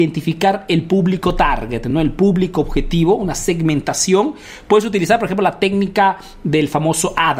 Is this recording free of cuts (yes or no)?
yes